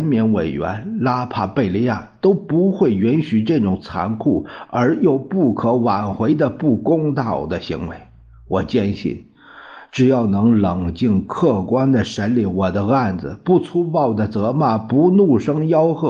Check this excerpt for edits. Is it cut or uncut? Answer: uncut